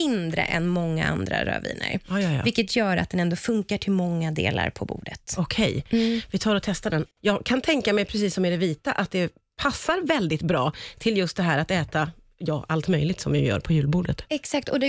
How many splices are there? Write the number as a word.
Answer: one